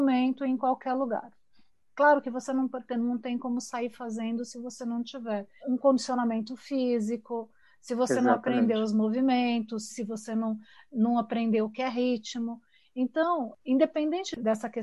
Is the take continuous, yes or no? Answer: no